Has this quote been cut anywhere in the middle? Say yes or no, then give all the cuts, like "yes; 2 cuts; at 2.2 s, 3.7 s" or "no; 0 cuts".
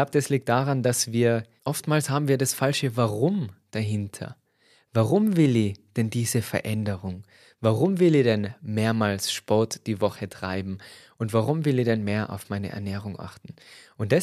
yes; 1 cut; at 1.6 s